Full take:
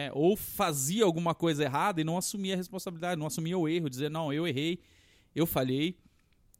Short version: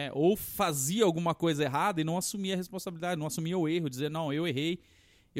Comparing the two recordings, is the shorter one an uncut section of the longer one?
yes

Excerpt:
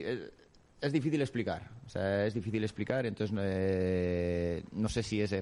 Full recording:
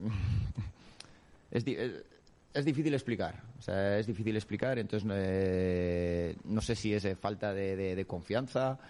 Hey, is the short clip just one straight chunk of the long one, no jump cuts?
yes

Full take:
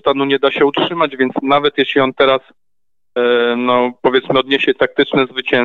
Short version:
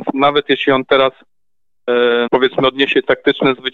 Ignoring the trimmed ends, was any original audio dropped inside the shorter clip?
yes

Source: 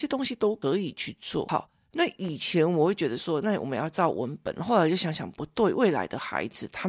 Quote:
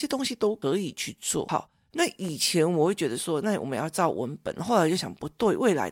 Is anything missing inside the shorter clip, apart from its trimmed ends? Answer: yes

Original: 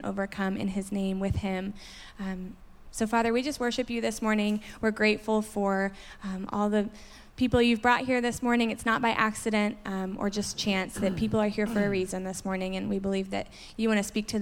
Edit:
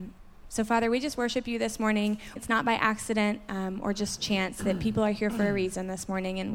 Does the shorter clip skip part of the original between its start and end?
yes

